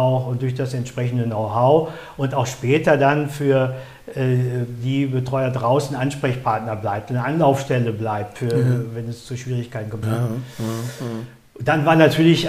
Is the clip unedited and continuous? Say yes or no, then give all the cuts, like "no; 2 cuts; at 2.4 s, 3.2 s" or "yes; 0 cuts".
no; 1 cut; at 10.0 s